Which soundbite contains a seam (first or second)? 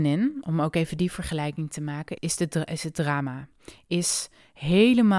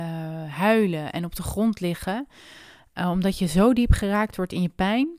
first